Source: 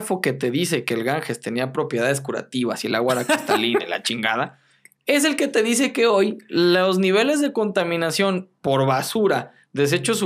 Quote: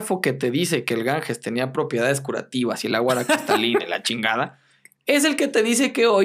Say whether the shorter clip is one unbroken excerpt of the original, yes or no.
yes